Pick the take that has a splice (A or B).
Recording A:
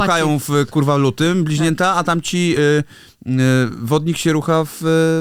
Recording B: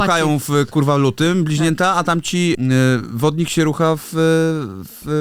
B